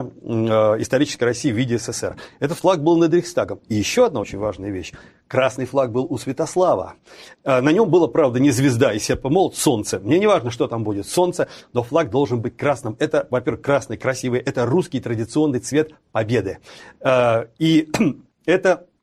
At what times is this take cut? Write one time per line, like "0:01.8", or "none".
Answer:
none